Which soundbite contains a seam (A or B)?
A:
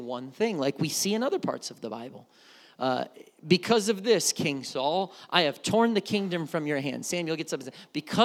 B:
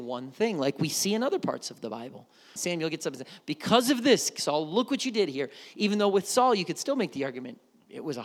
B